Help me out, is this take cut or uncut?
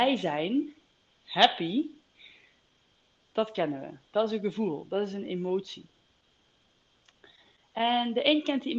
uncut